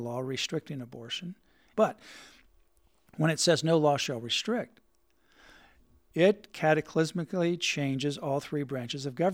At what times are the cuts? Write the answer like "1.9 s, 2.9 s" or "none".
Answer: 1.7 s